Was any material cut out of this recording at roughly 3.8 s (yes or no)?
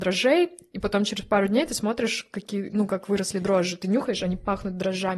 no